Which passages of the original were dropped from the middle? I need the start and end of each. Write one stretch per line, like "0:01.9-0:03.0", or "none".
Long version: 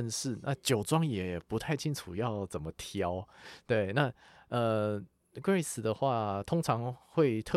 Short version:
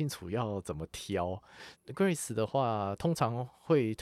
0:03.6-0:05.2